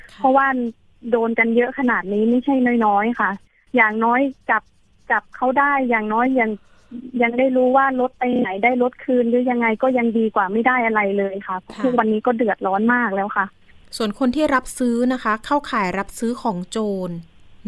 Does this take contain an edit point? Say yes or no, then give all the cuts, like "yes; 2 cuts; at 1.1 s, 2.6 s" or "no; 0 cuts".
no; 0 cuts